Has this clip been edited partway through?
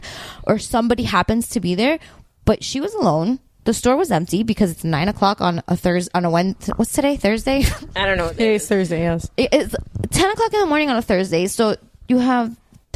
no; 0 cuts

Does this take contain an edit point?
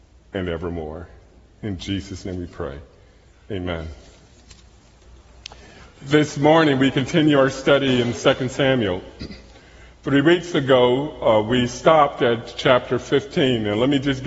no; 0 cuts

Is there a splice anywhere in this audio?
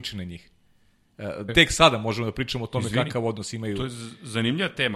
yes; 1 cut; at 1.5 s

